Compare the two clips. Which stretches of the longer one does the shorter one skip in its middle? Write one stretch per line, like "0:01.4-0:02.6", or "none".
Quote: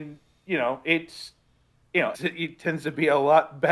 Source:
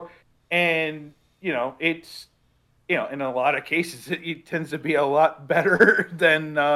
0:03.1-0:04.0

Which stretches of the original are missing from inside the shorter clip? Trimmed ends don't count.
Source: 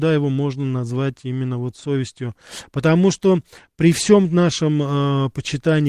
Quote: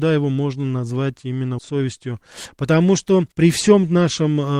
0:01.6-0:01.7
0:03.5-0:03.7

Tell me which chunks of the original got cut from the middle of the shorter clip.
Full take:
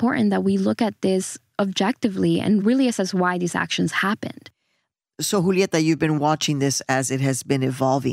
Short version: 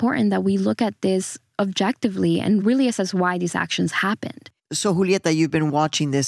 0:04.6-0:05.1

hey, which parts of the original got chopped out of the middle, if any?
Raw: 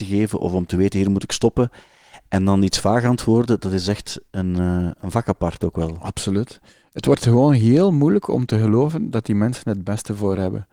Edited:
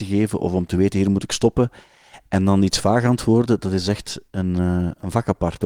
none

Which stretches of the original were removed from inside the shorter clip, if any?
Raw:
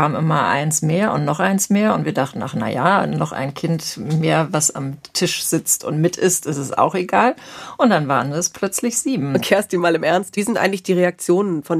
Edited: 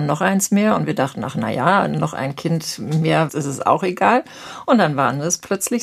0:04.5-0:06.4

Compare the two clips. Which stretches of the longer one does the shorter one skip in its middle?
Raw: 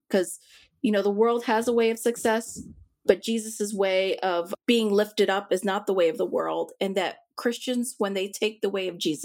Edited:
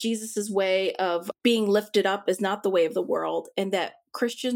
none

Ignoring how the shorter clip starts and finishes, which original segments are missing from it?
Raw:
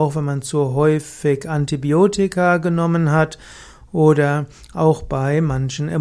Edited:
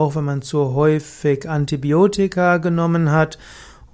none

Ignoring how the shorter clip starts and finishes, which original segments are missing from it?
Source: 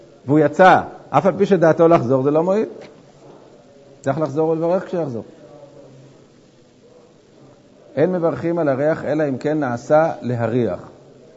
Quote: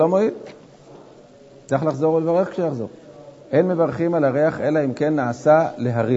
0:05.7-0:07.8

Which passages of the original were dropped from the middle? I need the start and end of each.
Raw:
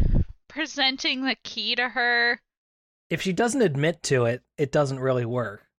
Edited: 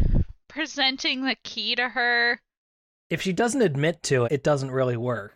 0:04.2-0:04.5

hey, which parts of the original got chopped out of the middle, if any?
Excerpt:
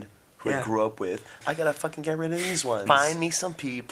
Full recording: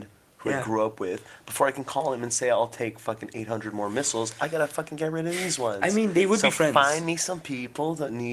0:01.4-0:04.4
0:05.8-0:06.7

